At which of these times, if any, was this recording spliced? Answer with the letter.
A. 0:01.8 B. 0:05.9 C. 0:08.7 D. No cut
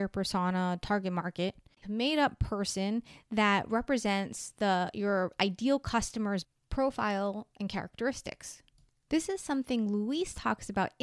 A